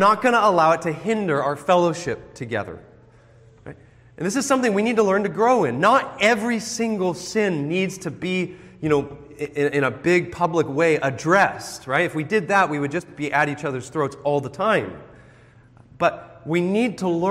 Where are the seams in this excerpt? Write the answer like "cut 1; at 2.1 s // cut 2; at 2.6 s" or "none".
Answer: none